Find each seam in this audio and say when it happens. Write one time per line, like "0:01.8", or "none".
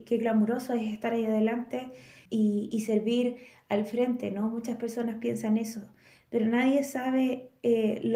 0:02.3